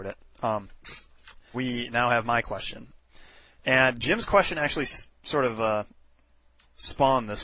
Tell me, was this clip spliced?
yes; 1 cut; at 1.5 s

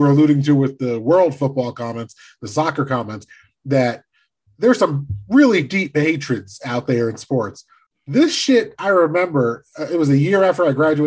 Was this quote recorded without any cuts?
no; 1 cut; at 7.9 s

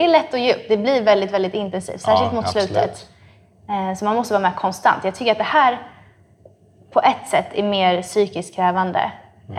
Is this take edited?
no; 0 cuts

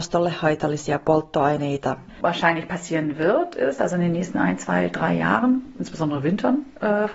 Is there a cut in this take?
yes; 1 cut; at 3.8 s

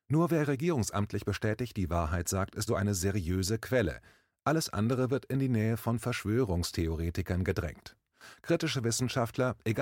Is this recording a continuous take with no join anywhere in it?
no; 1 cut; at 2.7 s

